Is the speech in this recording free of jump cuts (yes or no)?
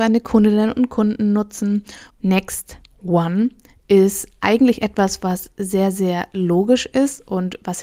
no